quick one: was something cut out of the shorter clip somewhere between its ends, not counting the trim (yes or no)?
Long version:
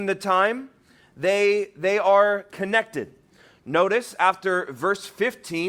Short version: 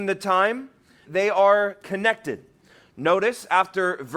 yes